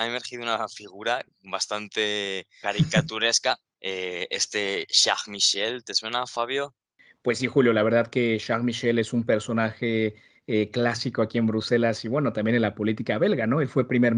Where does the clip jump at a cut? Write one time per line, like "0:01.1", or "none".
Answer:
none